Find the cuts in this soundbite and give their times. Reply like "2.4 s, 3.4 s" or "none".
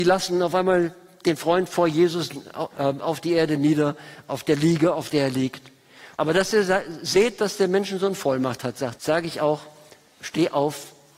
6.1 s, 8.9 s